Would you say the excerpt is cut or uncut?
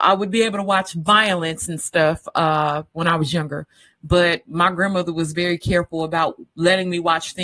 uncut